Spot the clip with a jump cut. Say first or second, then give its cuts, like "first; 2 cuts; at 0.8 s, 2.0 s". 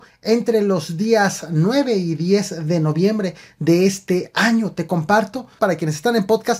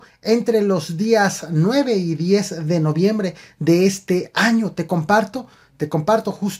first; 1 cut; at 5.6 s